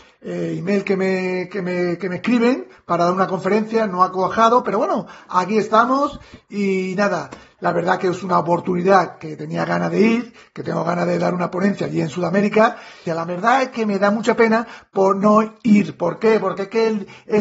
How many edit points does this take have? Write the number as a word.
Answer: two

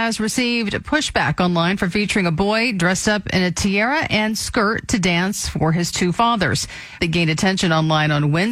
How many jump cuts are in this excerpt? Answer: one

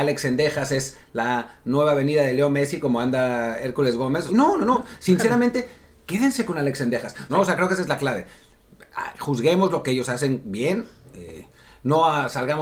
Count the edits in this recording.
two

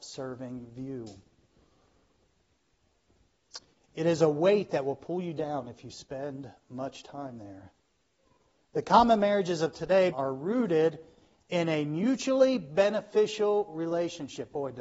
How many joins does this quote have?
two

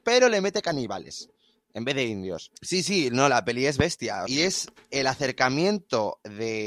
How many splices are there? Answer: two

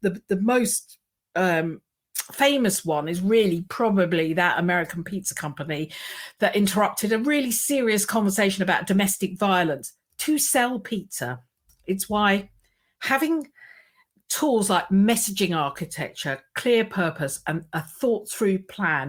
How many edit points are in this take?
zero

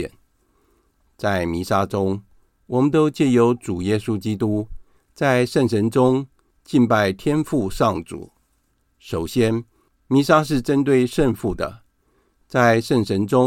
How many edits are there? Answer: zero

